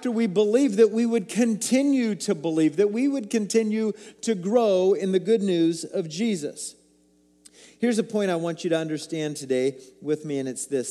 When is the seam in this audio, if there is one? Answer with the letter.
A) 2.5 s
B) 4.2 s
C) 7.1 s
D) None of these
D